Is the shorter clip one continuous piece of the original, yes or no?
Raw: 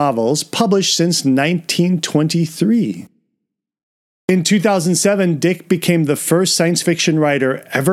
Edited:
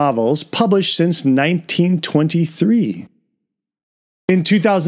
yes